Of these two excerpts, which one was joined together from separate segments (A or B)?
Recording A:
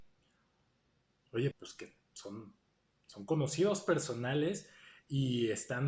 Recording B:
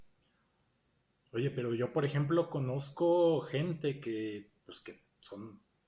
A